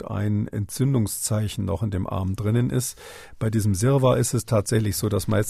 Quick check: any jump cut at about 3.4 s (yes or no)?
no